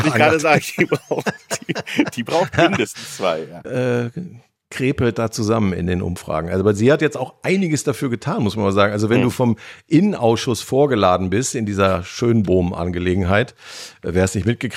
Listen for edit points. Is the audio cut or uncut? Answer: cut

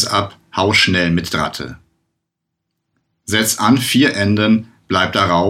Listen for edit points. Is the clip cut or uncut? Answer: uncut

